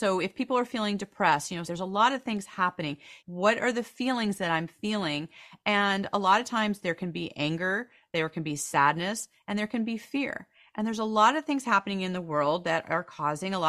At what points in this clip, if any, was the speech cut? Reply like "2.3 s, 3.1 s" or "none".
1.6 s, 3.2 s